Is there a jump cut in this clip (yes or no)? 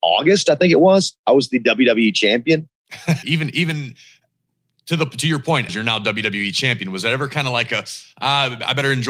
yes